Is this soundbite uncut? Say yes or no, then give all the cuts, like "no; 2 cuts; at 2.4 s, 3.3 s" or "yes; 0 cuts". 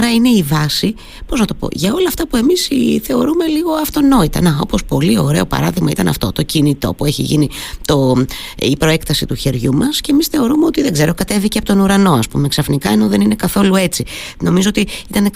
yes; 0 cuts